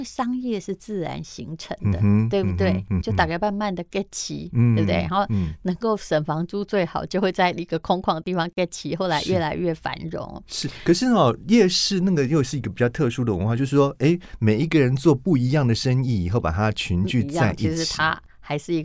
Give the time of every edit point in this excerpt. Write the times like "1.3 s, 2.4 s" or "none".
3.0 s, 13.6 s